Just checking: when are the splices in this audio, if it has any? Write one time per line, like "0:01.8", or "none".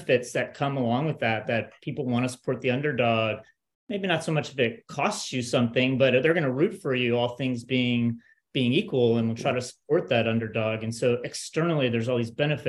none